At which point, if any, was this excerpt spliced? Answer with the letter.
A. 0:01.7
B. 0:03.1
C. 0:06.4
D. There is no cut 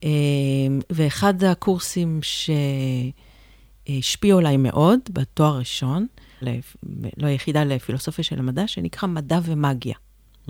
C